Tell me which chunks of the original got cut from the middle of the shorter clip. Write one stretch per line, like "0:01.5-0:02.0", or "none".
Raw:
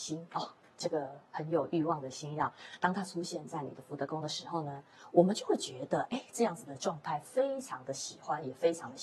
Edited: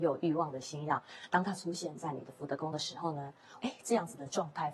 0:05.1-0:06.1